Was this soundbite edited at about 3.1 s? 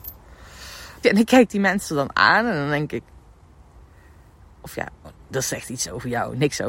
no; 2 cuts; at 1.0 s, 5.0 s

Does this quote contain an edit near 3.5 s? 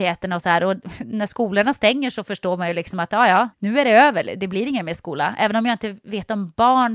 yes; 1 cut; at 3.5 s

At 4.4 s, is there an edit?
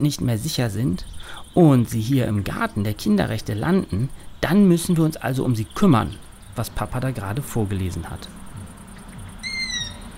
no; 1 cut; at 6.6 s

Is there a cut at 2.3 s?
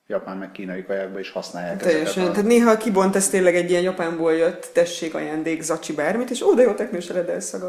no; 0 cuts

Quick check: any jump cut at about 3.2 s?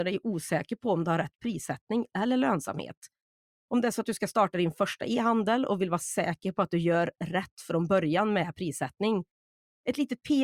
no; 0 cuts

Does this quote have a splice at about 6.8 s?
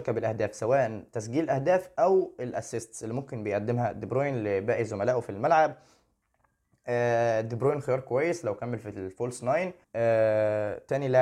no; 1 cut; at 9.8 s

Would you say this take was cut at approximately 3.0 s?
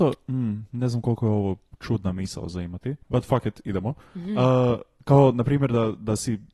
yes; 1 cut; at 3.0 s

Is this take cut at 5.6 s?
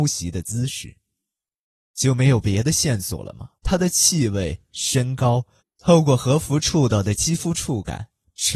yes; 2 cuts; at 3.6 s, 5.6 s

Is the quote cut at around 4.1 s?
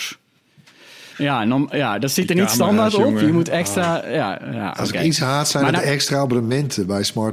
no; 1 cut; at 1.1 s

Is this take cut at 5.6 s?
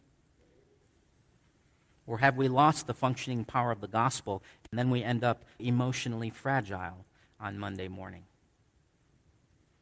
yes; 1 cut; at 5.6 s

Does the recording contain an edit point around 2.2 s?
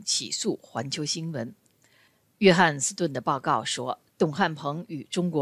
no; 1 cut; at 4.1 s

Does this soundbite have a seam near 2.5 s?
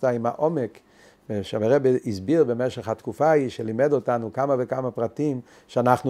no; 0 cuts

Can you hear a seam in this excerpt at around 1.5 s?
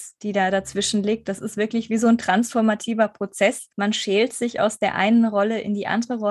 no; 1 cut; at 3.7 s

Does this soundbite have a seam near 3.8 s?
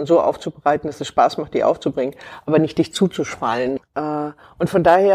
yes; 1 cut; at 3.8 s

